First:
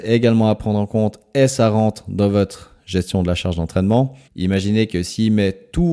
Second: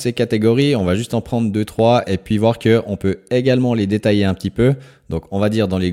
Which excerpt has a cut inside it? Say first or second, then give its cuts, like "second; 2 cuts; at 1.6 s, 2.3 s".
first; 1 cut; at 4.3 s